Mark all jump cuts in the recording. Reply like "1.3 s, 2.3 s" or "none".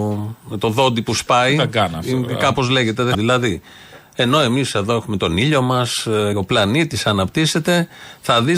3.1 s, 6.3 s